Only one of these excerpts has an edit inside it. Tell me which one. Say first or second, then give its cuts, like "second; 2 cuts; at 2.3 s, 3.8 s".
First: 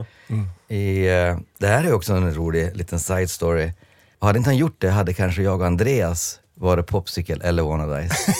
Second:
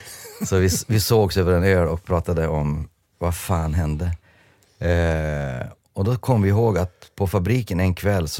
first; 1 cut; at 4.1 s